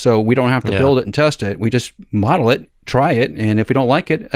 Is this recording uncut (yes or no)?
yes